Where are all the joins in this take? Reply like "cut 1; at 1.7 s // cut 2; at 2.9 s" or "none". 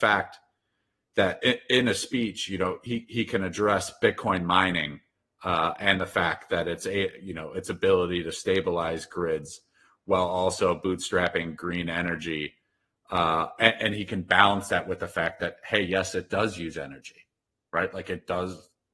none